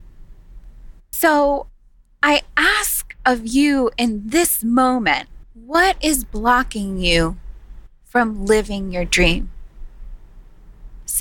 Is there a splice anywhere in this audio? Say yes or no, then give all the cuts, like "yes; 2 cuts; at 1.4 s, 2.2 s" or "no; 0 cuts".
yes; 2 cuts; at 1.1 s, 5.4 s